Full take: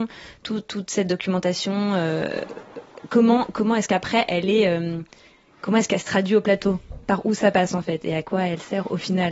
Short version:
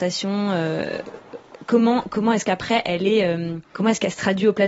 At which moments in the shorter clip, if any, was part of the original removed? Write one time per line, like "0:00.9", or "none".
0:03.6